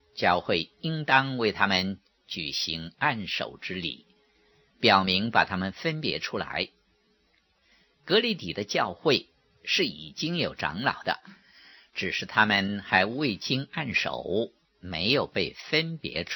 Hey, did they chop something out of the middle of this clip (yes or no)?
no